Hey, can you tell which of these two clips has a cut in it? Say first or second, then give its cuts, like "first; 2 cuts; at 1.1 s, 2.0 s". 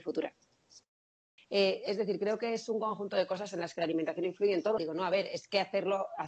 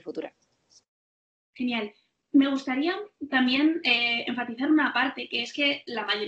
first; 2 cuts; at 1.4 s, 4.8 s